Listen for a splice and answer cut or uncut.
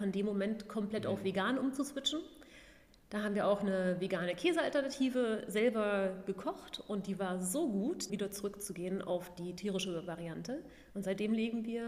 cut